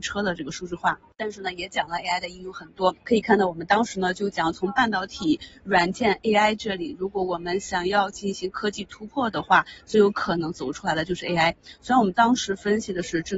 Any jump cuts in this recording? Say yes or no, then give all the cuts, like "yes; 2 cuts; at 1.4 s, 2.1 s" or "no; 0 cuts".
yes; 1 cut; at 3.0 s